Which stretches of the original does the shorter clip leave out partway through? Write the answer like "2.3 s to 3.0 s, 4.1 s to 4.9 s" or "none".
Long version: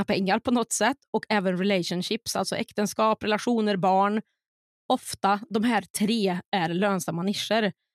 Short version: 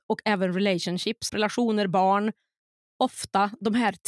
2.3 s to 3.2 s